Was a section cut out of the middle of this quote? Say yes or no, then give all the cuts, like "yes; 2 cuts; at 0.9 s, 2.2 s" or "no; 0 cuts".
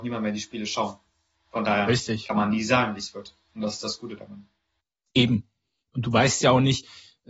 no; 0 cuts